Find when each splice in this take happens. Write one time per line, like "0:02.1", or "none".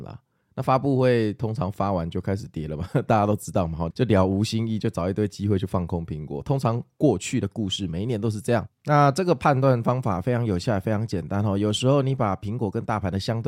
0:03.9